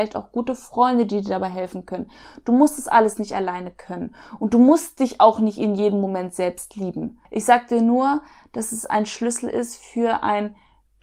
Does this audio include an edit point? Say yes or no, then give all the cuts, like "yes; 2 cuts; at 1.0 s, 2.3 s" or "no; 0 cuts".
yes; 1 cut; at 7.3 s